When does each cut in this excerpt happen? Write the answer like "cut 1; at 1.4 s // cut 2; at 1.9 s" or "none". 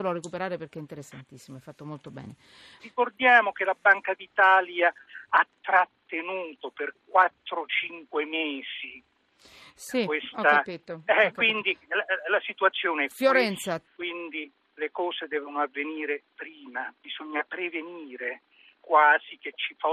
cut 1; at 2.8 s // cut 2; at 13.8 s // cut 3; at 18.8 s